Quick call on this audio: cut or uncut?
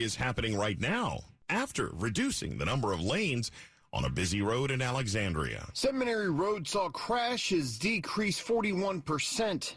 uncut